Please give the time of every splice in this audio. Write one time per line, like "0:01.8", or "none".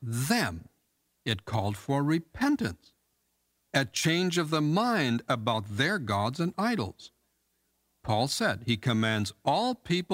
none